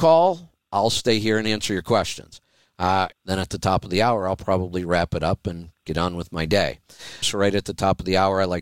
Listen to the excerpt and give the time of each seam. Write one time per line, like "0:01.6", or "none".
0:03.1
0:07.2